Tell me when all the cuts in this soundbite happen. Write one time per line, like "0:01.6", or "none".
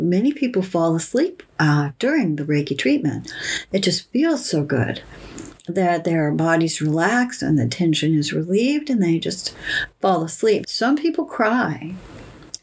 0:10.6